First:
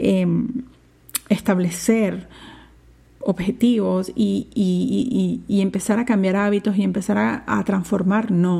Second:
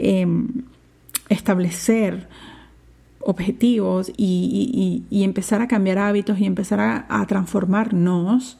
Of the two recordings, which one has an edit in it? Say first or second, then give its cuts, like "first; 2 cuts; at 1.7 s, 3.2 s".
second; 1 cut; at 4.1 s